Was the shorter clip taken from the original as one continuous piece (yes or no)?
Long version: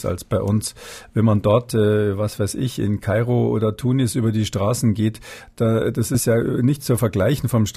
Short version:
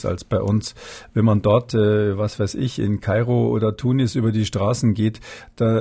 yes